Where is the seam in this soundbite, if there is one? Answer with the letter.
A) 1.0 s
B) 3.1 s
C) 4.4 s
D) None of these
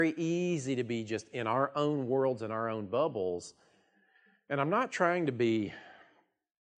D